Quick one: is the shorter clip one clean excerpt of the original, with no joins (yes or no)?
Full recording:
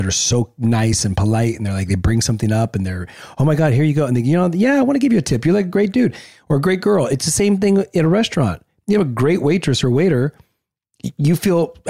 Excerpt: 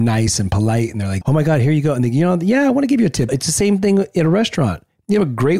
no